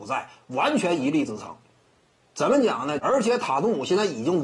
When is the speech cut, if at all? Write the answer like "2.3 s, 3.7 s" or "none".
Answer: 3.0 s